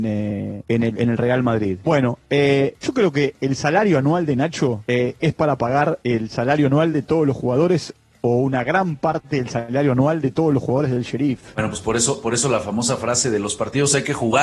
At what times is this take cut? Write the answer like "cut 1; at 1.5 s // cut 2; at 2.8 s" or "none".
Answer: cut 1; at 1.8 s